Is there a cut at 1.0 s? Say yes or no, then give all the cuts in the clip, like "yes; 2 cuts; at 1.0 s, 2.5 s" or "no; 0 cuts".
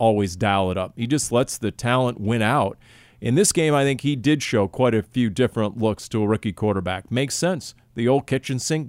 no; 0 cuts